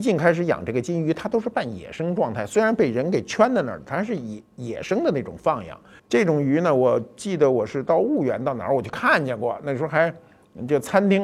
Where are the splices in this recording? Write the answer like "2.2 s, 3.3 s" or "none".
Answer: 6.0 s